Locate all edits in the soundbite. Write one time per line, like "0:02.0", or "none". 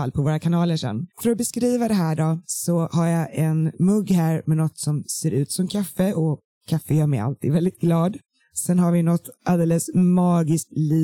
0:01.1